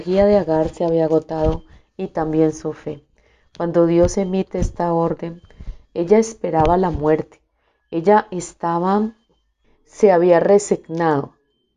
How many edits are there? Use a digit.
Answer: 1